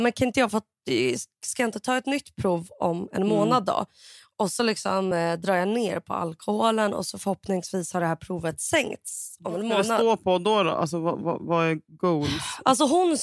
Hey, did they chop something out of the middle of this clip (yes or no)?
no